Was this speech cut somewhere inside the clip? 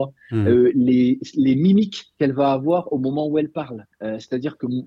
yes; 1 cut; at 3.9 s

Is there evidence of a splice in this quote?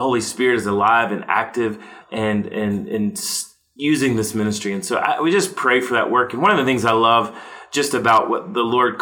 yes; 1 cut; at 2.0 s

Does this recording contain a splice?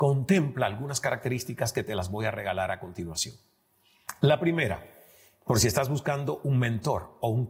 no; 0 cuts

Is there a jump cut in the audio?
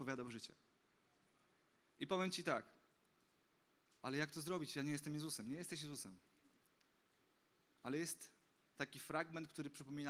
no; 0 cuts

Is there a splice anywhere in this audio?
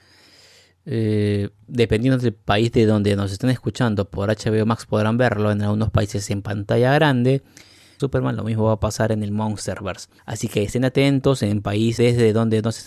yes; 3 cuts; at 8.0 s, 10.2 s, 12.0 s

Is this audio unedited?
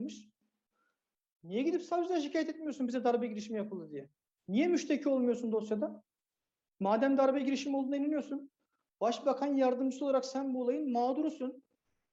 yes; 0 cuts

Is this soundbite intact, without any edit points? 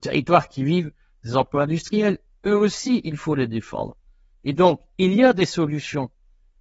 yes; 0 cuts

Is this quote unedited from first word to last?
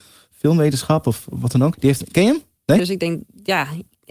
no; 2 cuts; at 1.7 s, 2.8 s

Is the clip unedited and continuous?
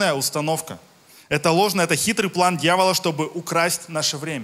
yes; 0 cuts

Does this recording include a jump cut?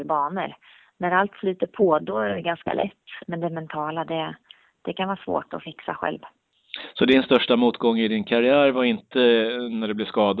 yes; 2 cuts; at 2.0 s, 3.2 s

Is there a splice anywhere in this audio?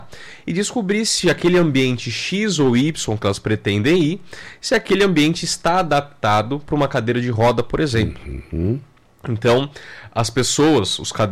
no; 0 cuts

